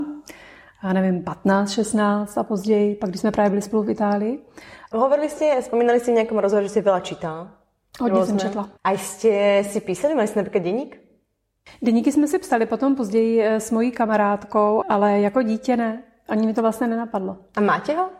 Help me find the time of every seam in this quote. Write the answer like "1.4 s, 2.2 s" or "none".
4.9 s, 8.8 s, 14.8 s

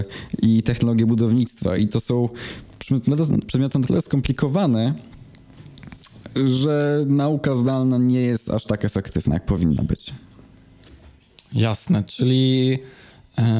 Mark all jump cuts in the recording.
none

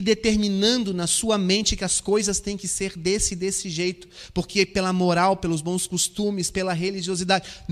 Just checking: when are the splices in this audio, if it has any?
none

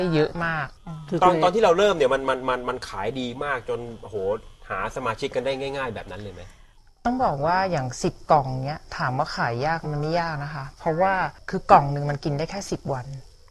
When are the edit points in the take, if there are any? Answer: 9.8 s

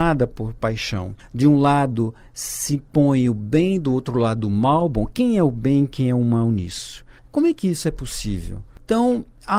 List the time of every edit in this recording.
7.3 s

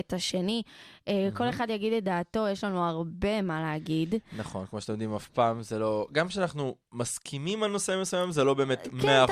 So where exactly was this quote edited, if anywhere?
none

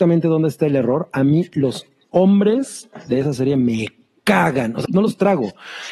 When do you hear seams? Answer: 4.8 s

